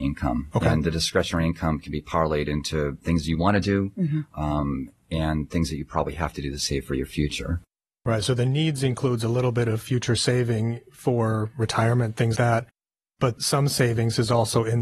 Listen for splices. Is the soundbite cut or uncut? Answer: cut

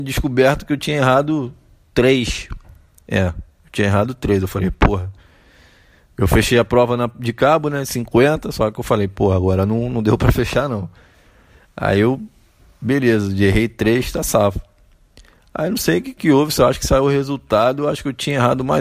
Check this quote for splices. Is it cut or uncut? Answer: uncut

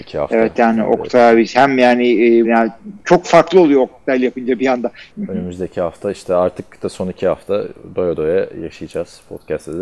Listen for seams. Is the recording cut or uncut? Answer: cut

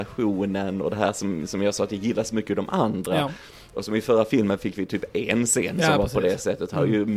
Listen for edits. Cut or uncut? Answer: uncut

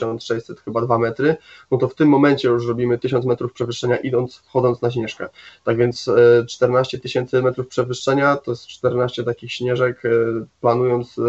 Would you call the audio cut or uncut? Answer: uncut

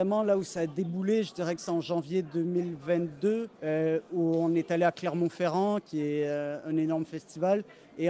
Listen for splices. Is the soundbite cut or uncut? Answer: cut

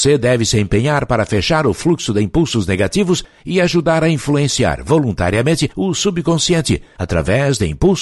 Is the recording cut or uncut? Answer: uncut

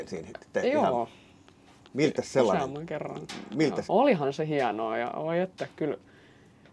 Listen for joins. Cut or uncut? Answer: cut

